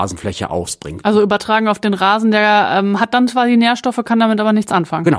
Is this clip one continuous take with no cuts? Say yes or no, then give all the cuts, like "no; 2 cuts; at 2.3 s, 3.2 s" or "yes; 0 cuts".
yes; 0 cuts